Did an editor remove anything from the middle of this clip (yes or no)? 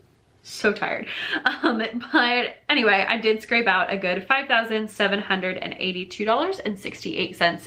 no